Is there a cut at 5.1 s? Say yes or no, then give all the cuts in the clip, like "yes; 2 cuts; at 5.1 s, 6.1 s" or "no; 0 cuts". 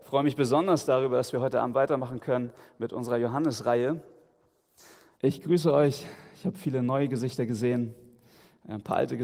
yes; 1 cut; at 5.1 s